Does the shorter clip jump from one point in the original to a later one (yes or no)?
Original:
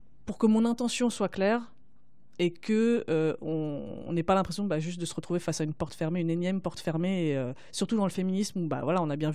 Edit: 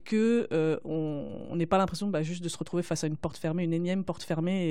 no